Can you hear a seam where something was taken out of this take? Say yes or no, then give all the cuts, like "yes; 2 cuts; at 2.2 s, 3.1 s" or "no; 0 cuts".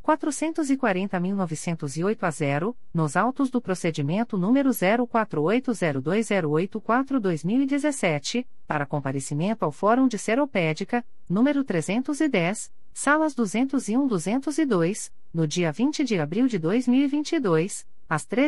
yes; 2 cuts; at 11.3 s, 12.9 s